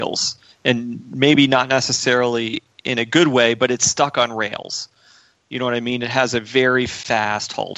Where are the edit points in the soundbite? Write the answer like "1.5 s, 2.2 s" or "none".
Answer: none